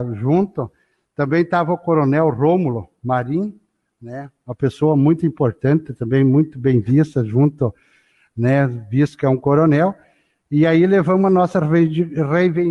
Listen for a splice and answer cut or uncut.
uncut